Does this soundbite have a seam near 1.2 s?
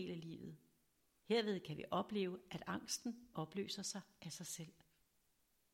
yes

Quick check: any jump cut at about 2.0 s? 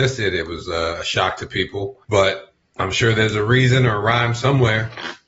yes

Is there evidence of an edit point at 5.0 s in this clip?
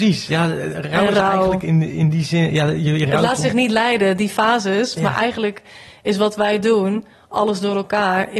yes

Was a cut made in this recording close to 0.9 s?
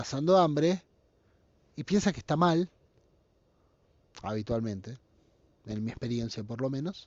no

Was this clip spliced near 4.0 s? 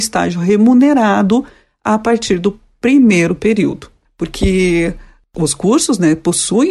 yes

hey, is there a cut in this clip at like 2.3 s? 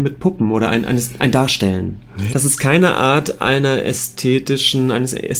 yes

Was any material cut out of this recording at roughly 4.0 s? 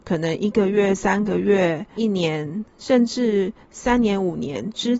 no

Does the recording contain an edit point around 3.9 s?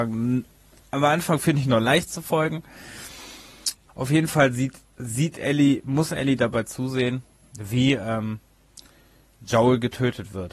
yes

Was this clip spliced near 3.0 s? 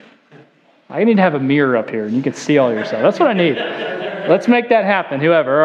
no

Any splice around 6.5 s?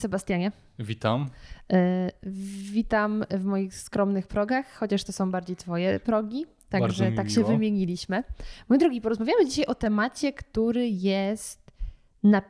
no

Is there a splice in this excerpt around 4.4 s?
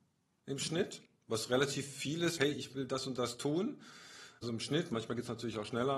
yes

